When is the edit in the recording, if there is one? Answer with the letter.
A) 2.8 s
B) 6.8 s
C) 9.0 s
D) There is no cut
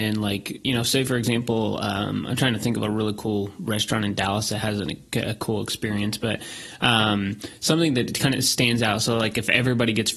D